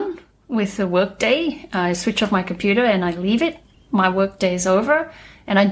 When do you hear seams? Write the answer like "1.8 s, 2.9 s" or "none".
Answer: 3.7 s

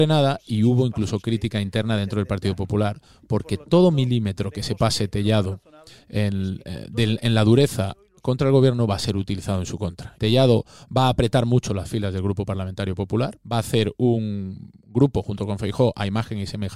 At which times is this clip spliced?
10.1 s, 13.4 s

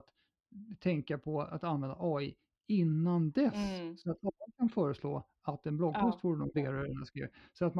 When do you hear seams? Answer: 6.5 s

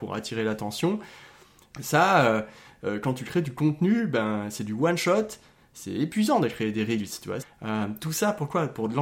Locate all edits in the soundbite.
1.7 s, 7.4 s

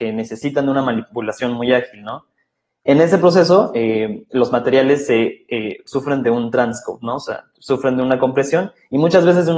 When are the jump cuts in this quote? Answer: none

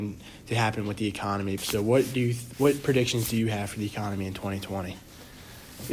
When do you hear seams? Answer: 1.6 s

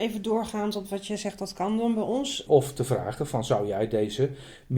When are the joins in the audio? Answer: 2.5 s

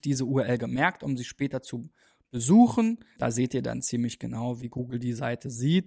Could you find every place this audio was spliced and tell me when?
3.2 s

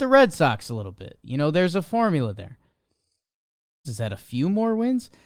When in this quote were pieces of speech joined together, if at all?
3.8 s

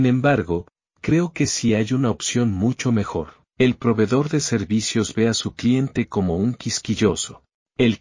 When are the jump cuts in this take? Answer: 3.5 s

